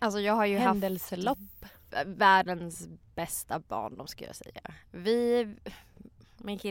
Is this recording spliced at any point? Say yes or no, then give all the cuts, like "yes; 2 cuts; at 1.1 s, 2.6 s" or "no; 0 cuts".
no; 0 cuts